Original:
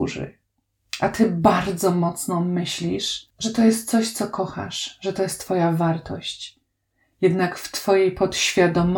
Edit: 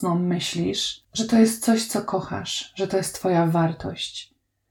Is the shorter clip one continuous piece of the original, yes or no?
yes